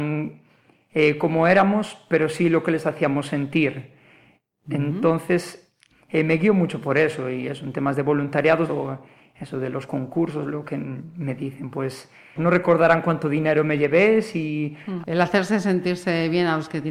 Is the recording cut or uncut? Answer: cut